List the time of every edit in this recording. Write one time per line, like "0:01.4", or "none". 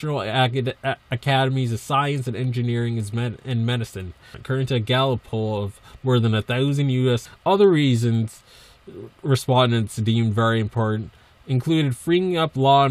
0:04.3
0:07.2